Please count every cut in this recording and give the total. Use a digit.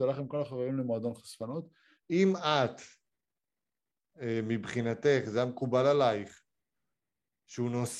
1